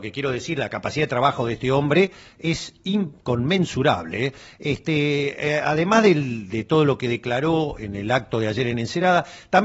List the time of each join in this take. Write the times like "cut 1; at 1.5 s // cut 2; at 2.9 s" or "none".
none